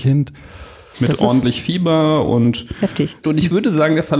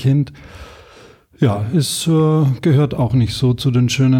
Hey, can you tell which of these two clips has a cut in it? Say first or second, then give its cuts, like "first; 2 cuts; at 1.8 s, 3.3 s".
first; 2 cuts; at 0.9 s, 3.2 s